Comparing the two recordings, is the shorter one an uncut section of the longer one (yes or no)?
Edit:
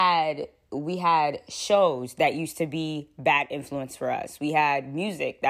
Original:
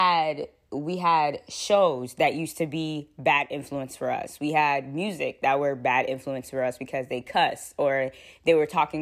yes